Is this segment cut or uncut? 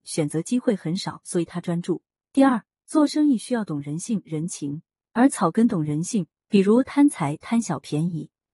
uncut